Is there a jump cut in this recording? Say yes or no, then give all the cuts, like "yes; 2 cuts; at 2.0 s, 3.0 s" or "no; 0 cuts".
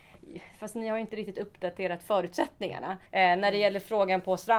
yes; 1 cut; at 3.1 s